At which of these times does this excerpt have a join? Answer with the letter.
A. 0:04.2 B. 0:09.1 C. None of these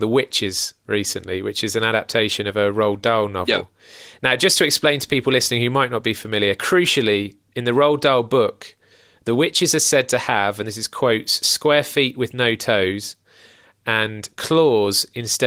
C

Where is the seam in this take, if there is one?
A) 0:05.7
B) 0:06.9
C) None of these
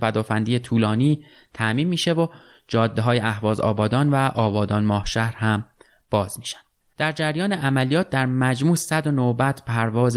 B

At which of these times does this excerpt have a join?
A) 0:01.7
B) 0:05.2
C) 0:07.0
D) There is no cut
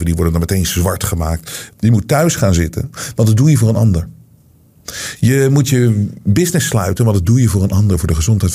A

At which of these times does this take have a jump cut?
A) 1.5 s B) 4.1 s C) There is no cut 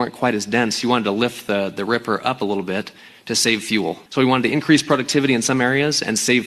B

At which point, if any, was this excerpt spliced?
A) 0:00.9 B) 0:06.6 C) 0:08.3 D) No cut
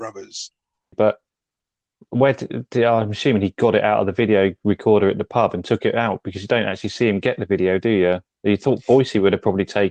A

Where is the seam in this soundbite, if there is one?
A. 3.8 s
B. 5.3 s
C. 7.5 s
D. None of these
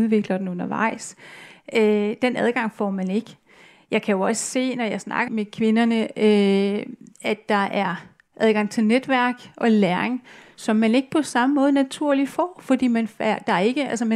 B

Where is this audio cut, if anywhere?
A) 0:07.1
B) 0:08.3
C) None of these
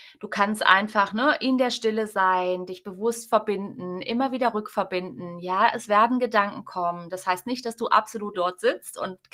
B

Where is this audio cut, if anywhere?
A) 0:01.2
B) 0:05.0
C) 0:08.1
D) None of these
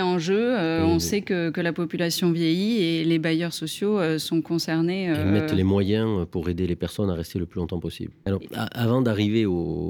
C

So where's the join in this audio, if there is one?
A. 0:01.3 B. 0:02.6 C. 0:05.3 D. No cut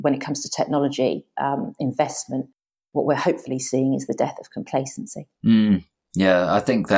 C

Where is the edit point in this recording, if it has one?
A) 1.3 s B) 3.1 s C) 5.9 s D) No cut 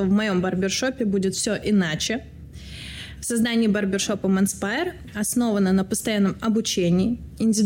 D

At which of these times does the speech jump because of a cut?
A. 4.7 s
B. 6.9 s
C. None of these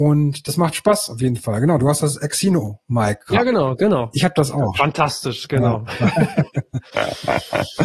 A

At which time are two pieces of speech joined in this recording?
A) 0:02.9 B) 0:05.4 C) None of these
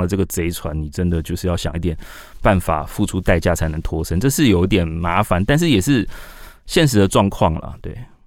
C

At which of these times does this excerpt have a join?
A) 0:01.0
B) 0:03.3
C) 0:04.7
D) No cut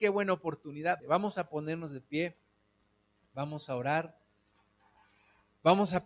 A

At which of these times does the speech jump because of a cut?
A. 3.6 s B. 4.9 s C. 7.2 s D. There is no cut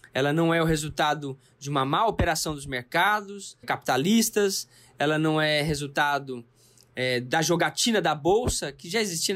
A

